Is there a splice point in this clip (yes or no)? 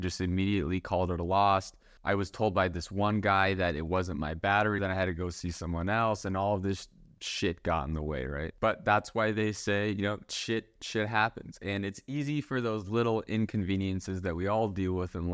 yes